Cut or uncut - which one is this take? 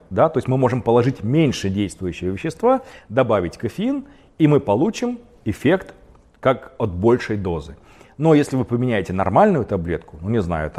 uncut